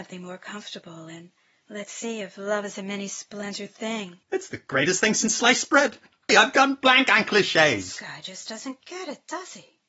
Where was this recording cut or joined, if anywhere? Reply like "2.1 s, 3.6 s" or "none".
4.2 s, 6.3 s